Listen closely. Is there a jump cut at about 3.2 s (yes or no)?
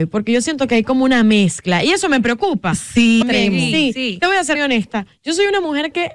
yes